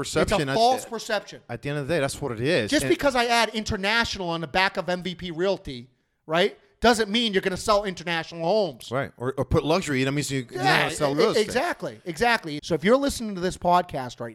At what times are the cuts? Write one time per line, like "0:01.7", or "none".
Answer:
0:11.1
0:12.6